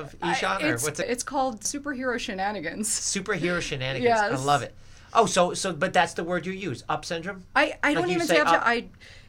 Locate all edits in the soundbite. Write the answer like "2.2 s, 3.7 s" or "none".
none